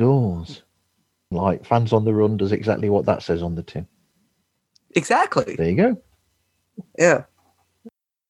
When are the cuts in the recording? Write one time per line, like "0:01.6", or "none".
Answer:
0:01.3